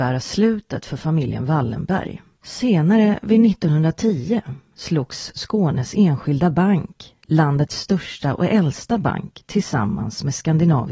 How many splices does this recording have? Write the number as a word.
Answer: one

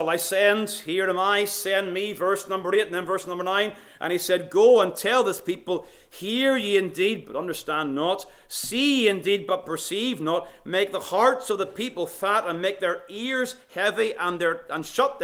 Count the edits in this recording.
zero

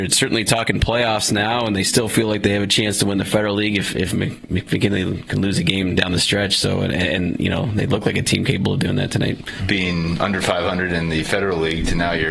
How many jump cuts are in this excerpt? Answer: one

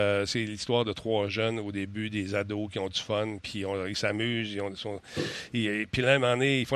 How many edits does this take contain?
one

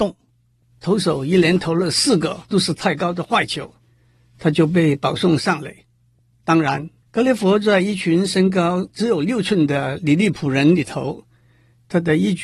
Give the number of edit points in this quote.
one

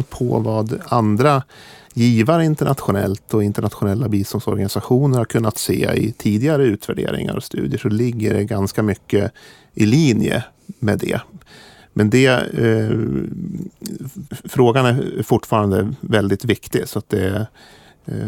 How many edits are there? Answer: one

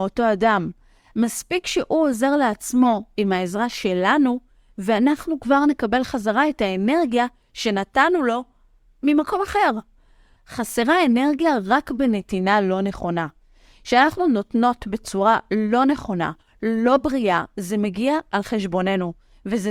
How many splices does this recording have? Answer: one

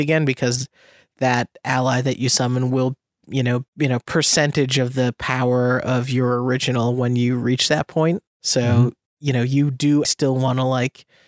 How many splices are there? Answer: two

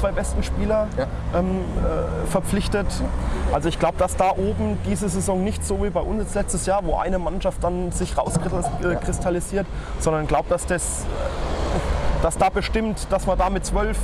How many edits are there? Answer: zero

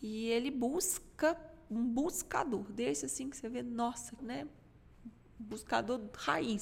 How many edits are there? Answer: one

